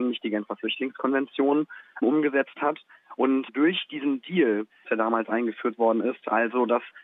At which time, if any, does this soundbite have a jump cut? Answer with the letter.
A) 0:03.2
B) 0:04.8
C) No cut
B